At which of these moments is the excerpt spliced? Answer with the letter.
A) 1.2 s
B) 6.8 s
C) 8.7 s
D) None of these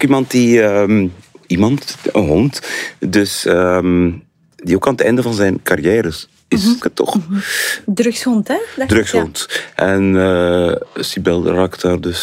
B